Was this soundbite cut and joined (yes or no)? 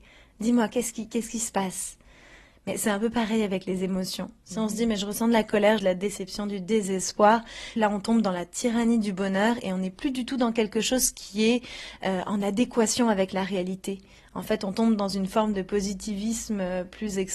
yes